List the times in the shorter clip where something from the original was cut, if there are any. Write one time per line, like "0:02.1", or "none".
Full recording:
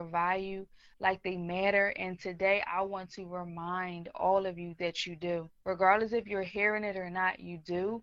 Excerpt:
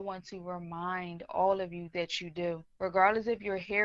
none

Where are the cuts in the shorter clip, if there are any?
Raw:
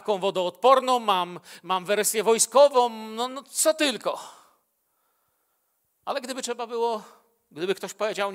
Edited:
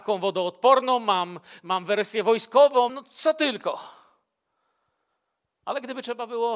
0:02.9

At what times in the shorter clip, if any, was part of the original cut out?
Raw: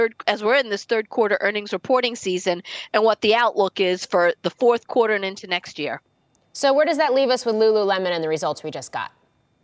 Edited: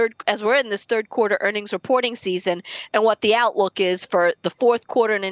none

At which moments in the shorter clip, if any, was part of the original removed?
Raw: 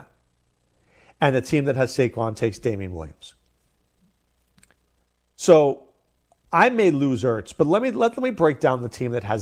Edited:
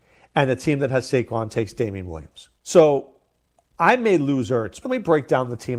0:02.6
0:04.8

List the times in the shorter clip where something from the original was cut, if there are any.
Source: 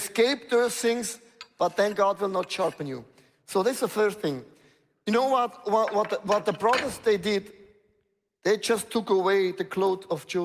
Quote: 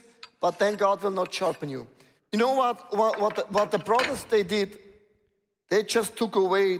0:02.2

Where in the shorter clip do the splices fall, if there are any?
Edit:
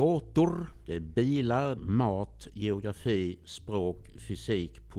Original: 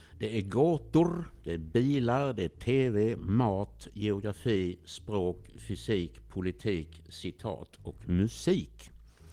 0:01.8

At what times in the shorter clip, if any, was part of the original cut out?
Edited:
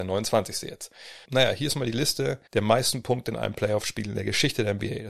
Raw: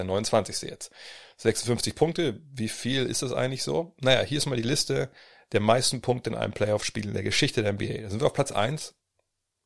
0:01.2
0:02.5

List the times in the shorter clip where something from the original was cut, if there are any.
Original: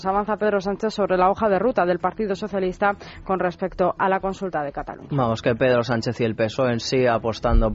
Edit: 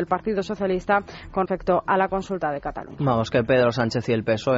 0:01.5

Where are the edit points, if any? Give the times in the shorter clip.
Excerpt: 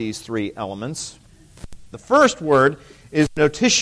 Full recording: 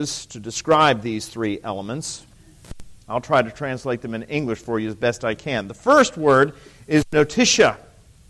0:01.9

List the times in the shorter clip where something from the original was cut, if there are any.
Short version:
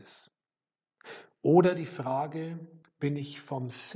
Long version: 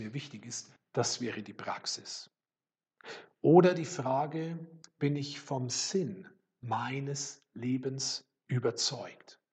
none

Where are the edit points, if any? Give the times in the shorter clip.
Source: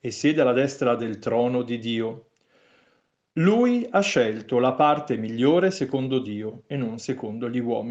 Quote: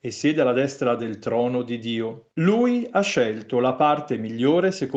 0:02.3

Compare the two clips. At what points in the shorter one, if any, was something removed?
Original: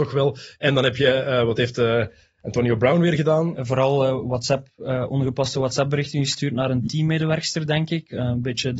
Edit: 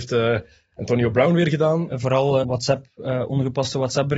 0:02.4

